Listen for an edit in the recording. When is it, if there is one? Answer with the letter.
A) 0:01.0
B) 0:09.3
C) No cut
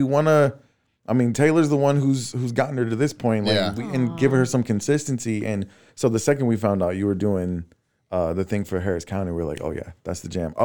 C